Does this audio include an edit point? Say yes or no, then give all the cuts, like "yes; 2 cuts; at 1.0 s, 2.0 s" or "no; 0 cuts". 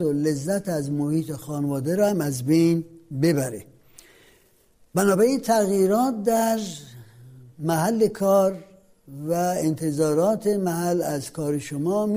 no; 0 cuts